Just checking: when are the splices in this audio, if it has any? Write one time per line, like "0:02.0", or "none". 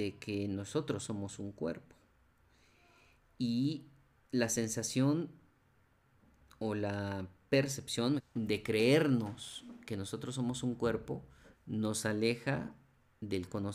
0:08.2
0:11.5